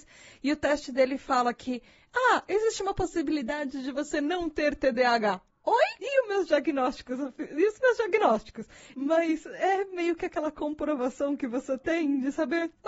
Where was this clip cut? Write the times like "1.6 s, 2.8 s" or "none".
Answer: 6.0 s, 8.9 s